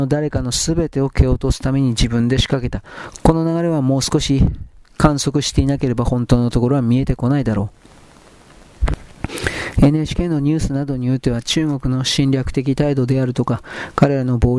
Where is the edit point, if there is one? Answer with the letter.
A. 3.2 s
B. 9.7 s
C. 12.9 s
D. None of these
A